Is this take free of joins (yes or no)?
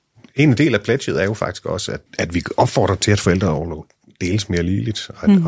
no